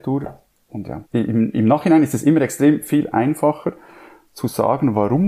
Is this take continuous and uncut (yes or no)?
no